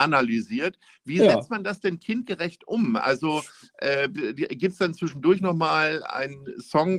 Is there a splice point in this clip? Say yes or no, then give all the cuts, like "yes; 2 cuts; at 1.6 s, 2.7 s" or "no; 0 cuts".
no; 0 cuts